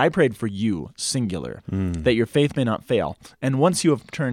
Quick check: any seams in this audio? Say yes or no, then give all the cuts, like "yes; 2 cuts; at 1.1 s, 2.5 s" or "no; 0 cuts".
yes; 1 cut; at 1.6 s